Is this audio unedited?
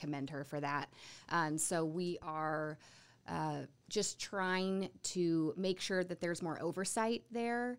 yes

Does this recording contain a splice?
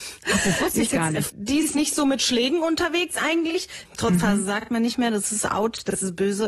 yes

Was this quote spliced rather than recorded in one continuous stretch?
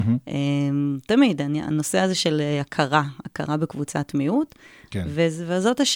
no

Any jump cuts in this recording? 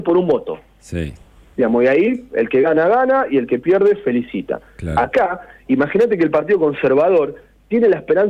no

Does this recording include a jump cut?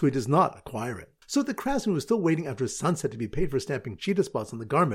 yes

